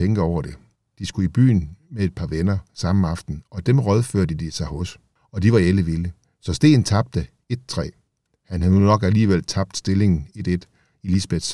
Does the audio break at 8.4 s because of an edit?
no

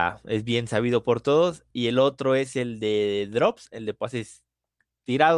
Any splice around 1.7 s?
no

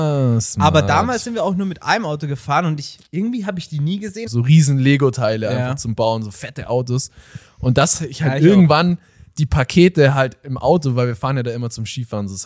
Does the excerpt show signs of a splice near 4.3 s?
yes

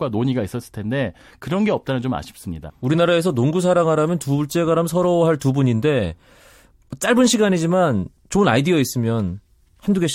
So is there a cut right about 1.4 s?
no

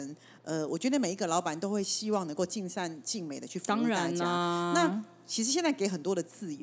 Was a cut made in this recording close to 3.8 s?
no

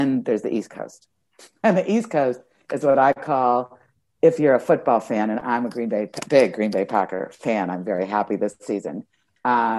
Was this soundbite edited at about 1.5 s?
no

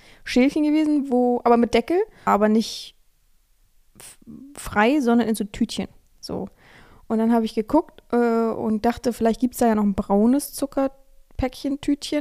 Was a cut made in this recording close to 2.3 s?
yes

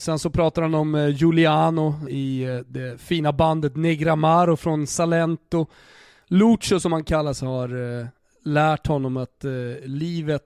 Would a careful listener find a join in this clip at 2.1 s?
yes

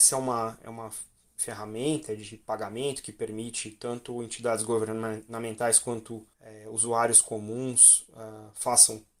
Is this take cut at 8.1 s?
no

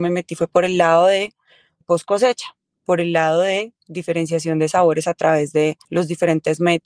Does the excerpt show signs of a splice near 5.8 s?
yes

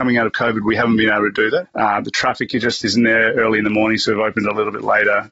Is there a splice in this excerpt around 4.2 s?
no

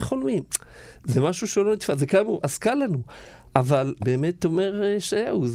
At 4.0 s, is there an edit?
yes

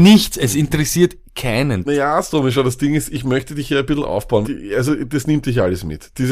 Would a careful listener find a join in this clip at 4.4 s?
yes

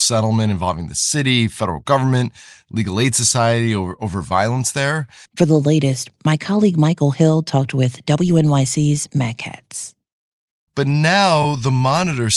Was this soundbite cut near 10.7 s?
yes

